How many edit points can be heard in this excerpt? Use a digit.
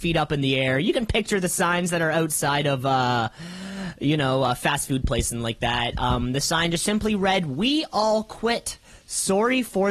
0